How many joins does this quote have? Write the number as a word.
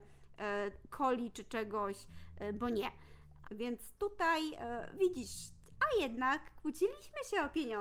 one